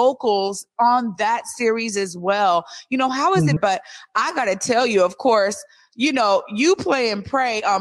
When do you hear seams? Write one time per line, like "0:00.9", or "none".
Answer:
0:03.6